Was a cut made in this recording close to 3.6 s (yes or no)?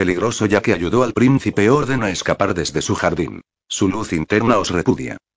yes